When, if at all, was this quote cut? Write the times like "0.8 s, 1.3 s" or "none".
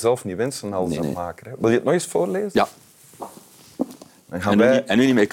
1.0 s